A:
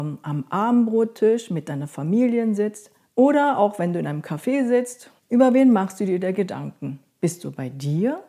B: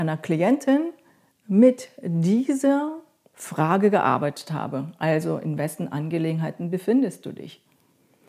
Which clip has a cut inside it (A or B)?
A